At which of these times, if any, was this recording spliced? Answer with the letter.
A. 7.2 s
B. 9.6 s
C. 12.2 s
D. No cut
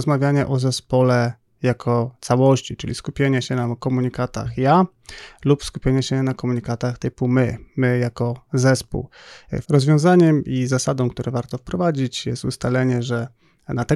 B